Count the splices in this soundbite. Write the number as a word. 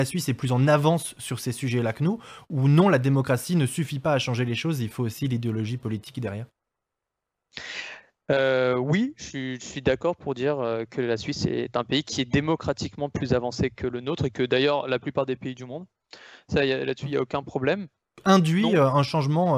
one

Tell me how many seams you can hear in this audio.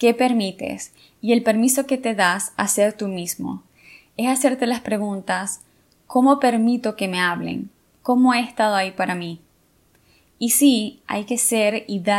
one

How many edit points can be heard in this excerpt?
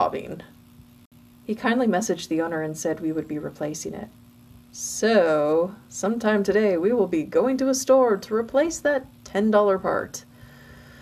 zero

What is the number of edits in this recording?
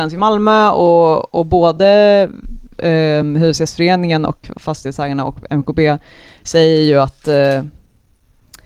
zero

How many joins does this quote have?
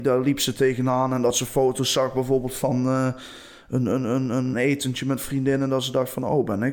one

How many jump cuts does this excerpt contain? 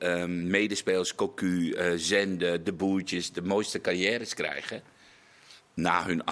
zero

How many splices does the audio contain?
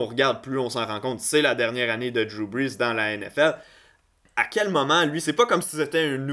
zero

